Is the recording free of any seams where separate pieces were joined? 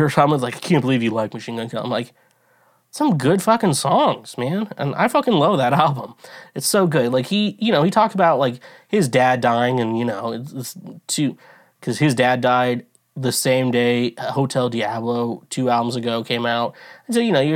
yes; 0 cuts

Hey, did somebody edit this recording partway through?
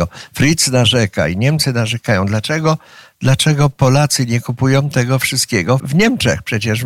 yes; 1 cut; at 5.8 s

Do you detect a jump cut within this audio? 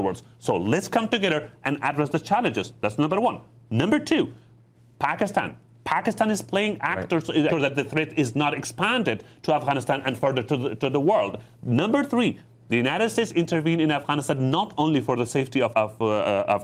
yes; 3 cuts; at 7.5 s, 12.6 s, 15.7 s

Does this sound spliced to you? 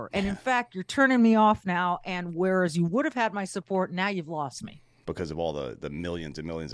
yes; 1 cut; at 5.0 s

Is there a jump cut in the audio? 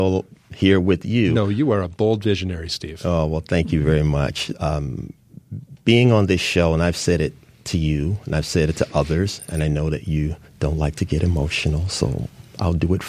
yes; 1 cut; at 4.5 s

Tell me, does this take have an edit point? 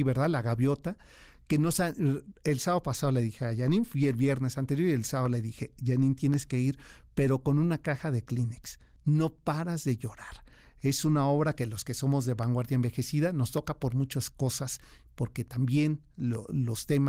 no; 0 cuts

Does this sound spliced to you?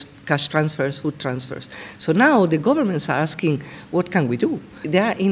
no; 0 cuts

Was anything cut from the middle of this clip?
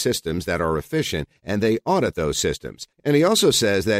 yes; 1 cut; at 2.9 s

